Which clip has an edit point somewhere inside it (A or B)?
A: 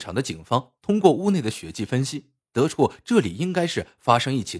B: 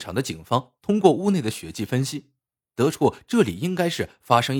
A